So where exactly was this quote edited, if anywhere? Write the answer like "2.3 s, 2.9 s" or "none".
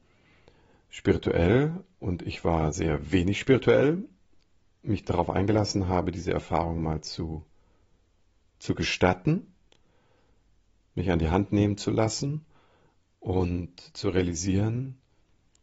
none